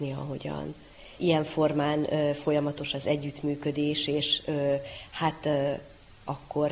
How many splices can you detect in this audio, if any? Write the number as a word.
one